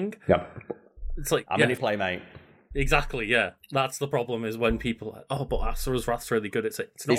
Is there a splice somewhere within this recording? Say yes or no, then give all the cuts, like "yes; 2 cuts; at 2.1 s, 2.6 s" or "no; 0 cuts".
yes; 1 cut; at 1.8 s